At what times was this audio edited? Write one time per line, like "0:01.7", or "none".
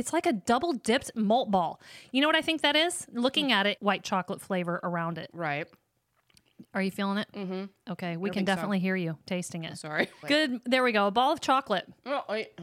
0:03.8
0:10.2